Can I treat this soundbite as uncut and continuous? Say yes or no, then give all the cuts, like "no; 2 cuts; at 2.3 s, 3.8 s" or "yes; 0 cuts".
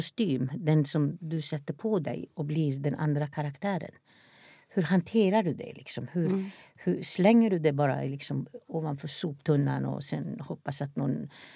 yes; 0 cuts